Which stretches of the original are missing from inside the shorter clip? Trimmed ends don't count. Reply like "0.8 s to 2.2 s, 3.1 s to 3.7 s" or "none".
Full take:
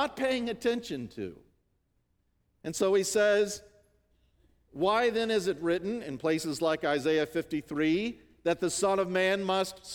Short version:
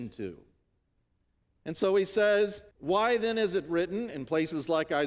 3.7 s to 4.6 s

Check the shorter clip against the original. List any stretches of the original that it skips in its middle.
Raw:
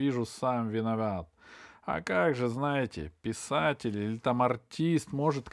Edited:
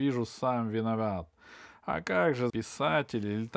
2.5 s to 3.2 s

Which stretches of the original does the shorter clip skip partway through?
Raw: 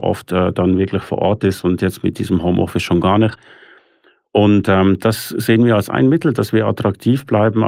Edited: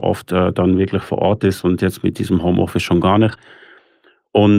none

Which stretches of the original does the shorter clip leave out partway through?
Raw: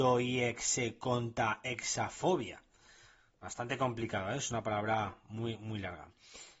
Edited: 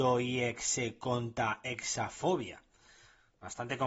none

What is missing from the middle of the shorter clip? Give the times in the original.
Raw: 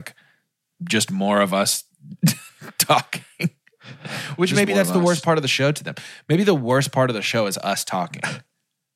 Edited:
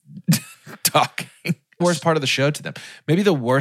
3.7 s to 5.0 s

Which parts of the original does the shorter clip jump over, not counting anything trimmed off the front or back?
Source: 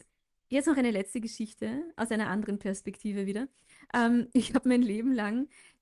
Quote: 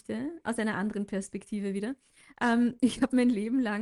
none

